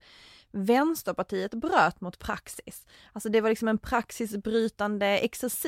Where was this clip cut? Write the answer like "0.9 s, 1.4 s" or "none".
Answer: none